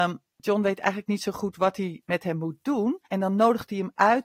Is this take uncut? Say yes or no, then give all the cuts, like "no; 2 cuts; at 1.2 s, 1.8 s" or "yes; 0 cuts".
no; 1 cut; at 3.0 s